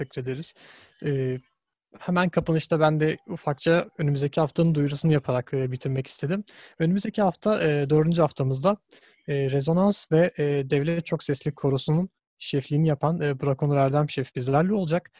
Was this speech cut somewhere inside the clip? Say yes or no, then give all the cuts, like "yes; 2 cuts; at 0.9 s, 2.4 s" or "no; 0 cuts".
no; 0 cuts